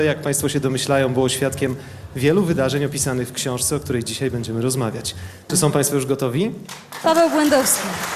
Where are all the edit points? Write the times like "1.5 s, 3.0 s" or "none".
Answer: 7.0 s